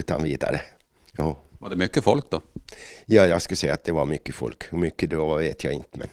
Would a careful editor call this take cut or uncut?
uncut